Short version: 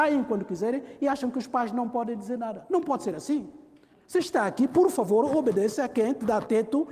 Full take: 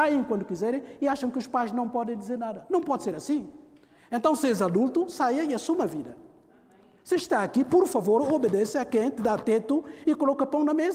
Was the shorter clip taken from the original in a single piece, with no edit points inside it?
no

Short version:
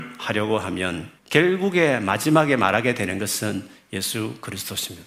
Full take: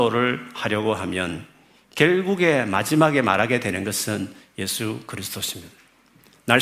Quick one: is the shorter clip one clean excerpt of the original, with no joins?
no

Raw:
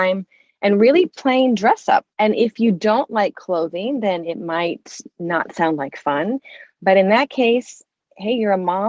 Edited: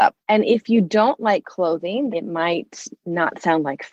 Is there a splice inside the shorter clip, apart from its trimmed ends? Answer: yes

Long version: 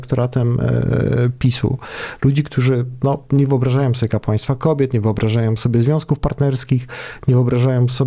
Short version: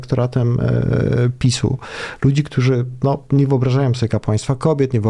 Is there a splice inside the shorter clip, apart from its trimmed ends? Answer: no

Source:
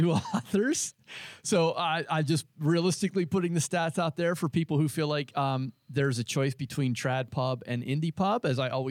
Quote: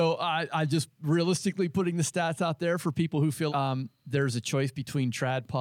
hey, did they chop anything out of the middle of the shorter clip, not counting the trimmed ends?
yes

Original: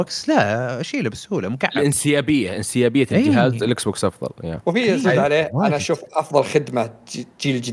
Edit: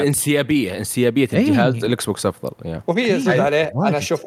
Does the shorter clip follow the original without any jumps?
yes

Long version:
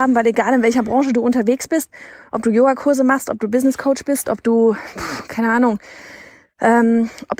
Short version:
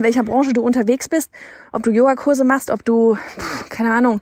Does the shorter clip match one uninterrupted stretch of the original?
no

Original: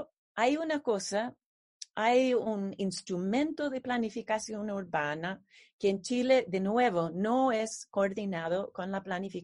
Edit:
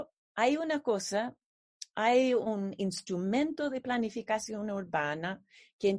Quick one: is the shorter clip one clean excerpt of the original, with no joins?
yes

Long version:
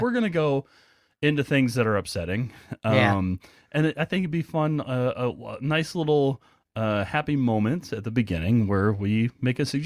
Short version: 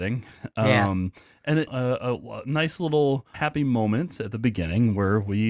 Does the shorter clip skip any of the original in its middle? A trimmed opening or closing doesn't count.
yes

